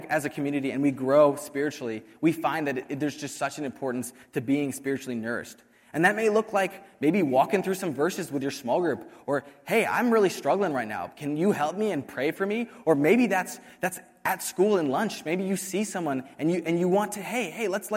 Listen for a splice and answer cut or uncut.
uncut